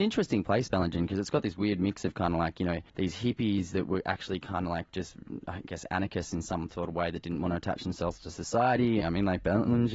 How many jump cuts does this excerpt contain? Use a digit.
2